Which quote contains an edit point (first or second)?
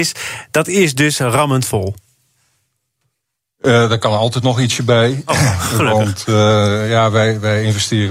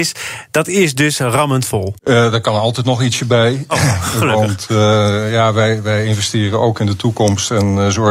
second